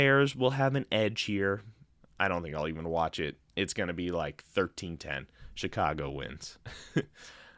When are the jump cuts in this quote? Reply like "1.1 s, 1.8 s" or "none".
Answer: 2.0 s

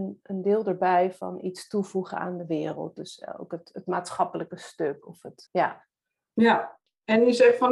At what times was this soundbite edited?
5.5 s

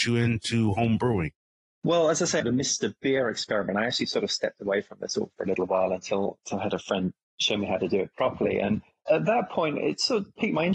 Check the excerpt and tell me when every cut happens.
2.4 s

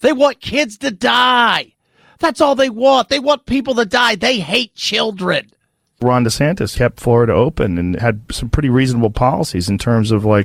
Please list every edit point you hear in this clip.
none

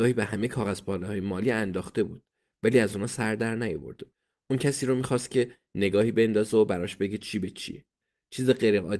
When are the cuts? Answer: none

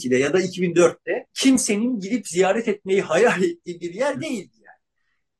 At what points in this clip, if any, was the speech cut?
1.3 s

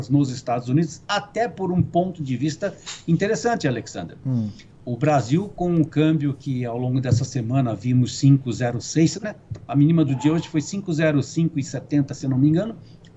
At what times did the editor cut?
9.2 s

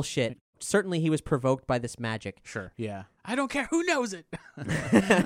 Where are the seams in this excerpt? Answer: 2.7 s

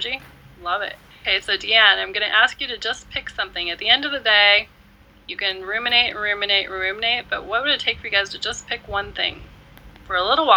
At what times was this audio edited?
none

